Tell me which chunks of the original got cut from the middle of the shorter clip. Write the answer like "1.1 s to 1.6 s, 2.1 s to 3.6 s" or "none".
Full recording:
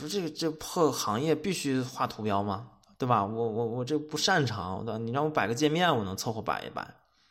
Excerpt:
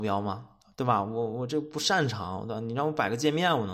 3.5 s to 3.7 s